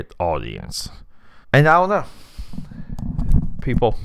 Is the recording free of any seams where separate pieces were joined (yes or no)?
no